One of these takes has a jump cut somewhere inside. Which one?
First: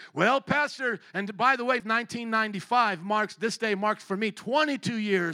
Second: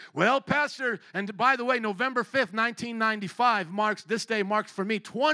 first; 1 cut; at 1.8 s

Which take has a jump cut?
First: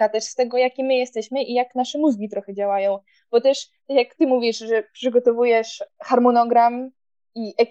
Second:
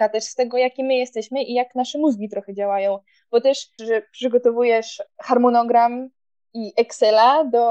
second; 1 cut; at 3.8 s

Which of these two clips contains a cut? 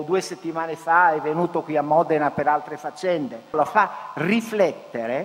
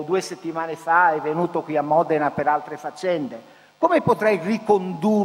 first; 1 cut; at 3.5 s

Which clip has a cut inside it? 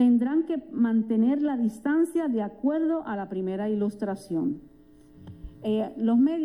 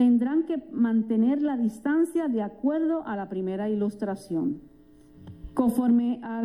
second; 1 cut; at 5.5 s

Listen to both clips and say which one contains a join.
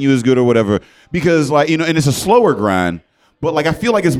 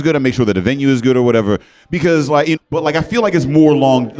second; 1 cut; at 2.6 s

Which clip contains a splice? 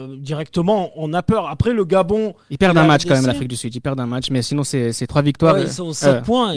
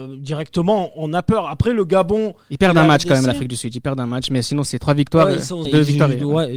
second; 2 cuts; at 4.7 s, 5.7 s

